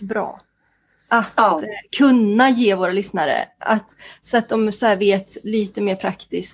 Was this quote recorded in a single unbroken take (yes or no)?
yes